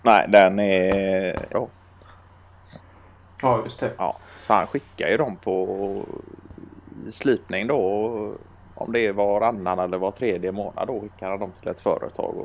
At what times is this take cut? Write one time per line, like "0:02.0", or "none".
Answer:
0:01.5